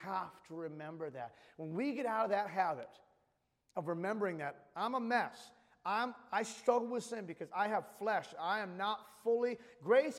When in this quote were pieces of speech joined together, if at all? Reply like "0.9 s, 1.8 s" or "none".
none